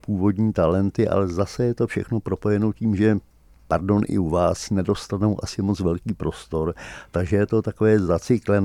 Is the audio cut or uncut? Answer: uncut